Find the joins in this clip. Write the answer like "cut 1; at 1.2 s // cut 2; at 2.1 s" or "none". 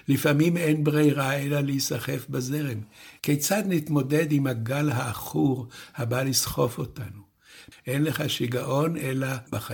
cut 1; at 3.2 s // cut 2; at 7.7 s